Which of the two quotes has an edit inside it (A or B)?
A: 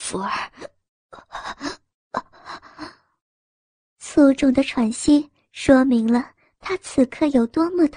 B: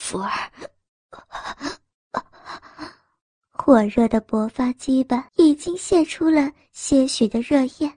B